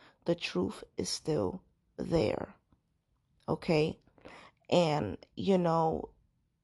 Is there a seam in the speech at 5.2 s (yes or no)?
no